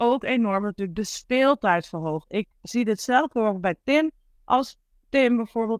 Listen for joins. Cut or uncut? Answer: cut